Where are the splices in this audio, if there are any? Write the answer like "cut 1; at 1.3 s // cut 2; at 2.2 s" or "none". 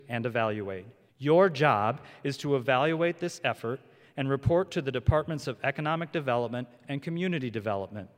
cut 1; at 1.1 s